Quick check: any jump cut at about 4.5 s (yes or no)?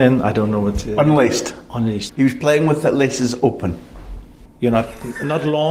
yes